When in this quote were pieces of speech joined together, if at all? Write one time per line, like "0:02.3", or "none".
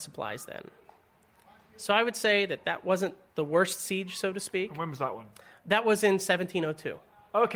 none